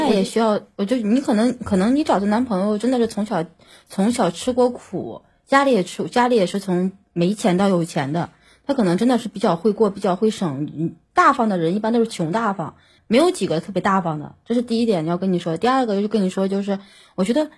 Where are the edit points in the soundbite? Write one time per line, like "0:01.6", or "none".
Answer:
0:13.0